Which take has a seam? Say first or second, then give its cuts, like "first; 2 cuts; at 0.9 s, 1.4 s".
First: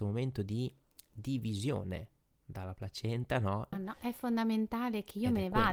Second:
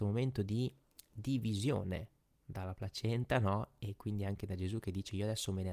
first; 1 cut; at 3.7 s